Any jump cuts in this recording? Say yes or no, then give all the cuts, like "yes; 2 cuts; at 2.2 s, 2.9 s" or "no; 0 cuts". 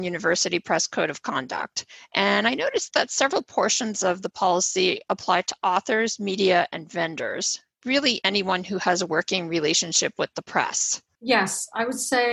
yes; 1 cut; at 11.1 s